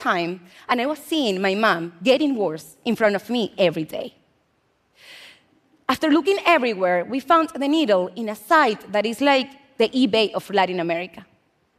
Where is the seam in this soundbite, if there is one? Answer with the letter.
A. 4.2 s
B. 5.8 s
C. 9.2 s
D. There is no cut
D